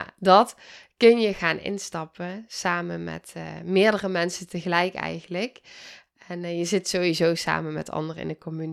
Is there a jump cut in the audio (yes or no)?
no